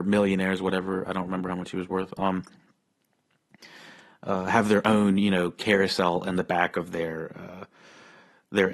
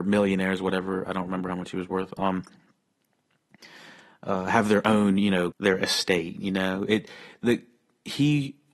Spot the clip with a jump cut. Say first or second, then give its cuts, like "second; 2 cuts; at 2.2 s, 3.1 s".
second; 1 cut; at 5.5 s